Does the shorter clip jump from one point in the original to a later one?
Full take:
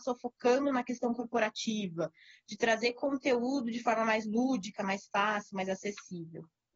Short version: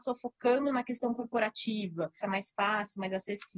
yes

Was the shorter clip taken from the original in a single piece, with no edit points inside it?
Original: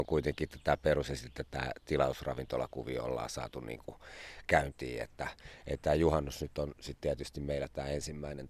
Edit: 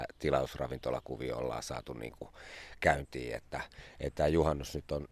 yes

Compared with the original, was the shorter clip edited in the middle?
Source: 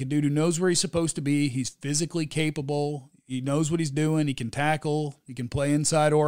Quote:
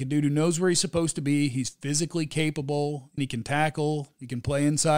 yes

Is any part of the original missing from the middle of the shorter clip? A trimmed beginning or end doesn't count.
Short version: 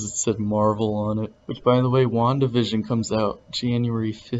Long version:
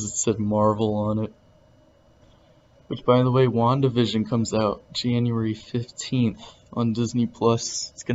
yes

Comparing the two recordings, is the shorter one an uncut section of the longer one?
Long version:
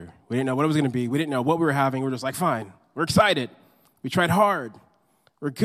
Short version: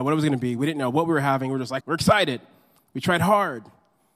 no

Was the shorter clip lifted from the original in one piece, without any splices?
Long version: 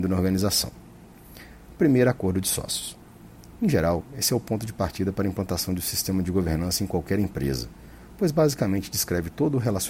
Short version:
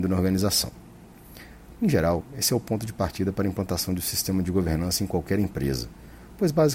no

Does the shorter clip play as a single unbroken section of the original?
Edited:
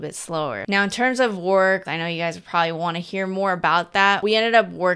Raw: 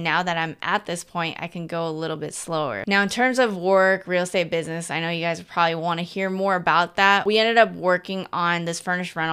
no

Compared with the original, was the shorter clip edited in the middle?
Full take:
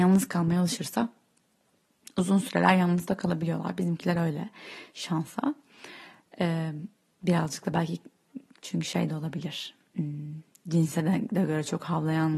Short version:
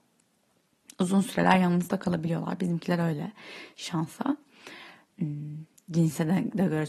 yes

